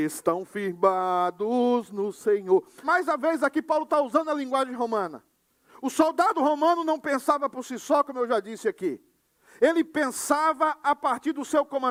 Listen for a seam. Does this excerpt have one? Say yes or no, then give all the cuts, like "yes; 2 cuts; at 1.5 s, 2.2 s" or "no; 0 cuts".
yes; 1 cut; at 2.8 s